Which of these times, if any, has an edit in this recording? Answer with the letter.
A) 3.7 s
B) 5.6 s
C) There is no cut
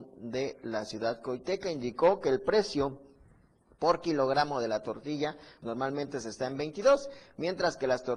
B